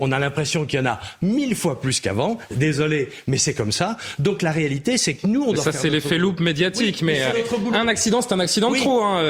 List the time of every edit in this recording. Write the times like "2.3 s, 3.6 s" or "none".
none